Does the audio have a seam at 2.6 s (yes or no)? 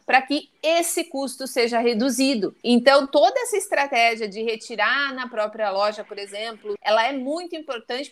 yes